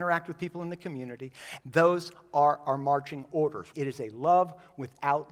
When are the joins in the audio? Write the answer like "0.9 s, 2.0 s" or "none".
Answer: 1.6 s, 3.7 s